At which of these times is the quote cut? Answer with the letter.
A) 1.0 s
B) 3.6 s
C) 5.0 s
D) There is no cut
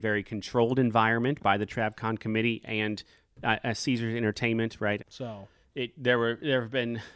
C